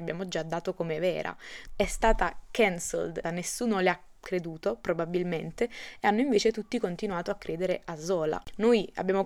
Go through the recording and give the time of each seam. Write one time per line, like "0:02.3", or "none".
0:01.7
0:03.2